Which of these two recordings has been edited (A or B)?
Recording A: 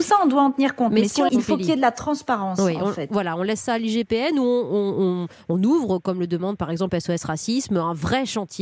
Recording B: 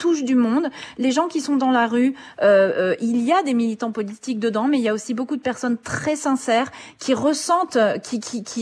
A